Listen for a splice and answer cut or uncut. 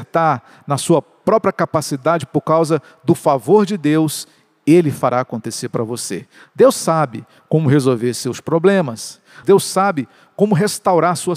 cut